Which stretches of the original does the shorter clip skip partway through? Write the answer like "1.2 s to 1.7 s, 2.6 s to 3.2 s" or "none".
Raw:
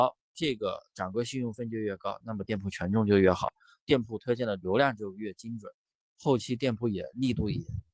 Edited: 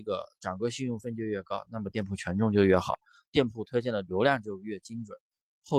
none